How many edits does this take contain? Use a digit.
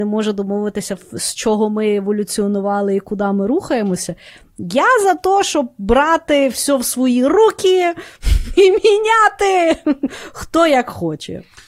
0